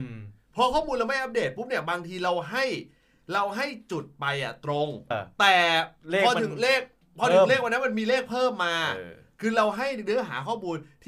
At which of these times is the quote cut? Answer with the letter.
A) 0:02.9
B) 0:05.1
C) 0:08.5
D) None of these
B